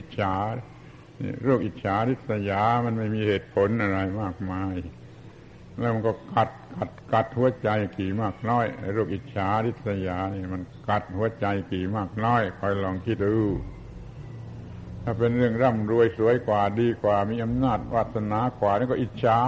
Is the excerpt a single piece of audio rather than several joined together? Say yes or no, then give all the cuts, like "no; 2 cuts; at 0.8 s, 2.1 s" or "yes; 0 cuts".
no; 1 cut; at 13.2 s